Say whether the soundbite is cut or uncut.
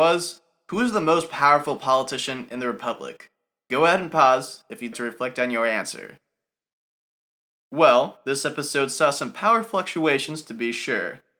cut